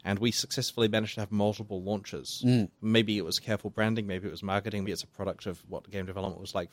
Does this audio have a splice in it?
yes; 1 cut; at 4.8 s

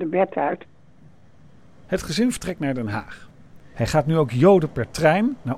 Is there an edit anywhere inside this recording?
yes; 1 cut; at 3.7 s

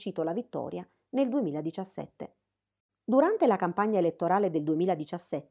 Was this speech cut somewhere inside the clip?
yes; 1 cut; at 2.9 s

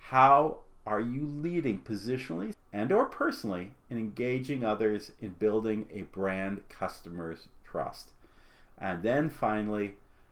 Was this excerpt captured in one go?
no; 1 cut; at 2.5 s

